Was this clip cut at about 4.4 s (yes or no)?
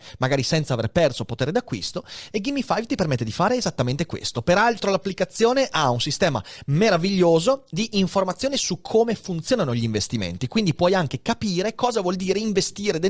no